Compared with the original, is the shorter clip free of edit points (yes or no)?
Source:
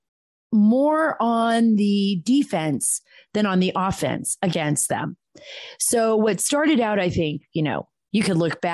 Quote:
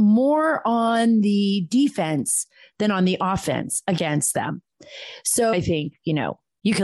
no